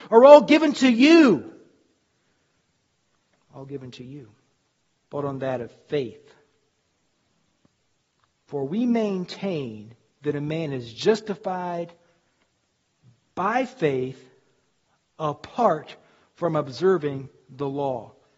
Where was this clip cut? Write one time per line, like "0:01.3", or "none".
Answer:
0:05.0